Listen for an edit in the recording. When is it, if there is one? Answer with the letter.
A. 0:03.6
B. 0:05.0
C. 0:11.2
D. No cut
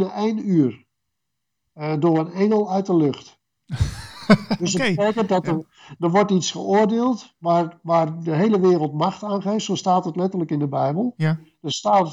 C